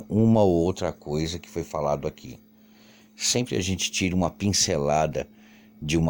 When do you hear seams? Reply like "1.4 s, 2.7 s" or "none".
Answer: none